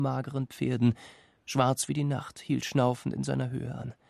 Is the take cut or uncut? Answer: uncut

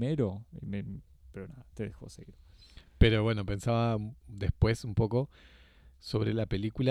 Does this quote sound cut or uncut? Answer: uncut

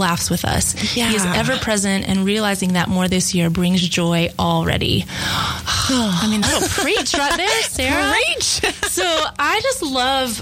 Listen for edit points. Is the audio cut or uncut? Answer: uncut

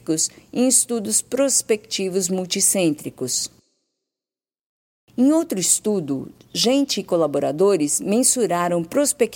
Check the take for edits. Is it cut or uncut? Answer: uncut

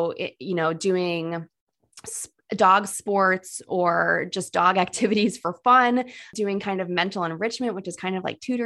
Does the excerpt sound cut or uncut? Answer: uncut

